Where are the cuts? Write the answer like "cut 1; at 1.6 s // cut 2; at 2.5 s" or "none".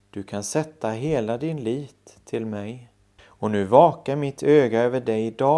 cut 1; at 3.2 s